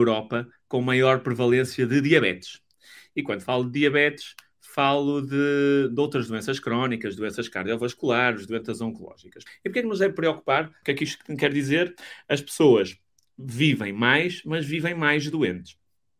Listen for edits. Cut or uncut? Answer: cut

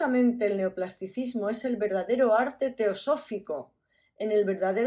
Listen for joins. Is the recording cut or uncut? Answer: uncut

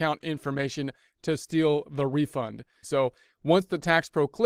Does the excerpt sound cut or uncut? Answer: cut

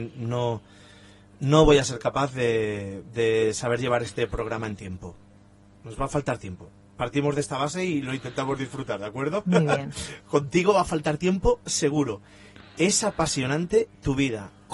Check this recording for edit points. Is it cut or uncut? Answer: uncut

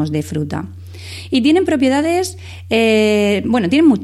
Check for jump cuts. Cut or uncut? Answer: uncut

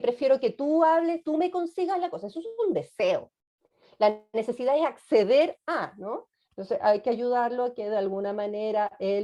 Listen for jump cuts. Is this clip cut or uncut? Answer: cut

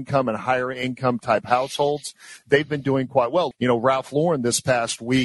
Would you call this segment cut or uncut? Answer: cut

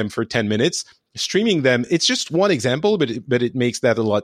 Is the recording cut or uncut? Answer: uncut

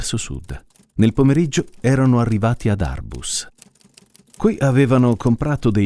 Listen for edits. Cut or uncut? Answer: uncut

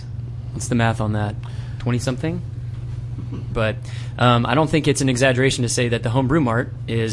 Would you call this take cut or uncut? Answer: cut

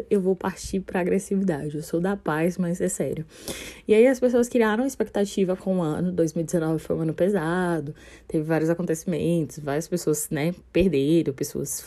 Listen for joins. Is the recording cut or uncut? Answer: uncut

